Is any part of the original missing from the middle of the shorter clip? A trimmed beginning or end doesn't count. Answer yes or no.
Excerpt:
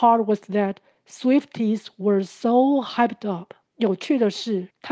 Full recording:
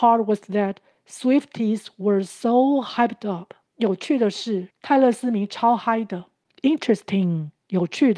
no